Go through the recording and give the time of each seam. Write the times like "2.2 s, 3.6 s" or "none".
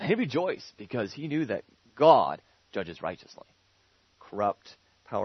4.1 s